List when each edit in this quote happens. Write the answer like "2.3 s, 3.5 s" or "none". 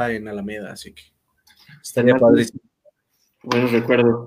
none